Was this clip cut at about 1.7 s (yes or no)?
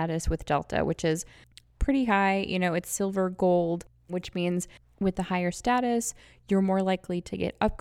no